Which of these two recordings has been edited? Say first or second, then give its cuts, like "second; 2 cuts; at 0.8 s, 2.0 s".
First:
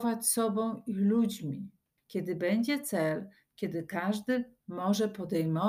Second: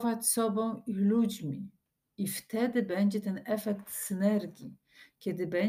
first; 1 cut; at 2.0 s